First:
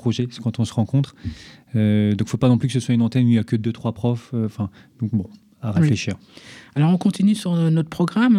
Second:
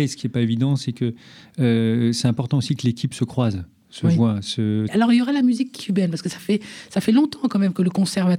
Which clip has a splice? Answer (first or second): second